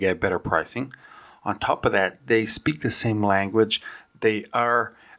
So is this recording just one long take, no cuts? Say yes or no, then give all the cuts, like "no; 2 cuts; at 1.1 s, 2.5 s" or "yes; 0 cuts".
yes; 0 cuts